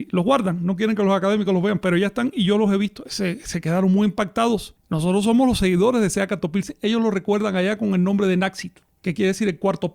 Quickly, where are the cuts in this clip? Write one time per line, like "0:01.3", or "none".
0:03.0
0:04.8